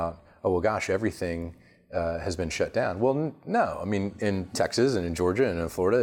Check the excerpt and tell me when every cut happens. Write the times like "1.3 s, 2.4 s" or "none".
none